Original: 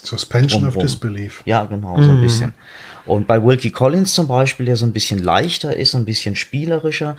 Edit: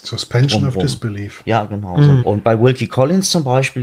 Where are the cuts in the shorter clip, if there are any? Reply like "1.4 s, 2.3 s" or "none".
2.2 s